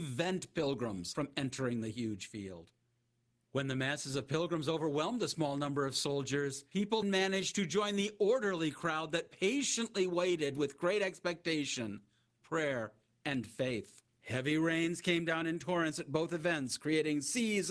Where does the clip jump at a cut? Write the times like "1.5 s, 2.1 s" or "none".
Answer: 7.0 s, 14.1 s